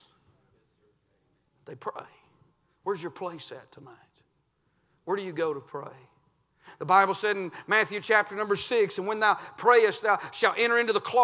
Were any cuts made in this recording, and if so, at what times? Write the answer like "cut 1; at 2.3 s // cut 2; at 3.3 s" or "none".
none